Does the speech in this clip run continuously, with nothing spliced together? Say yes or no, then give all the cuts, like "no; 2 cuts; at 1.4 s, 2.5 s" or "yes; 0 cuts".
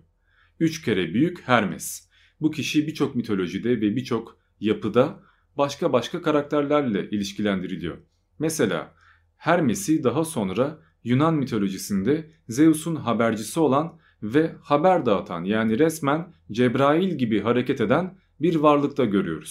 yes; 0 cuts